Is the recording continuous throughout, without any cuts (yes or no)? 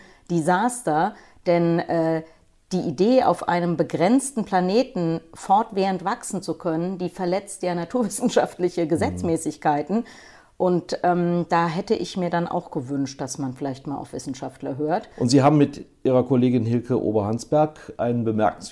yes